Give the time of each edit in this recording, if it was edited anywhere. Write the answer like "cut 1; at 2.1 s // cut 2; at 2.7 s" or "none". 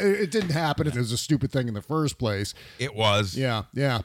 cut 1; at 0.9 s